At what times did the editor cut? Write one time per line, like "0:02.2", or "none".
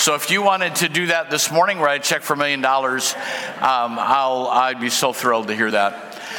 none